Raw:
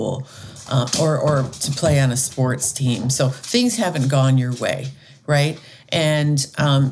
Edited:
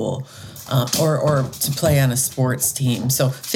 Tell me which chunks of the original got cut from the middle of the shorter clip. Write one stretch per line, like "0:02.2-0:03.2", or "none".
none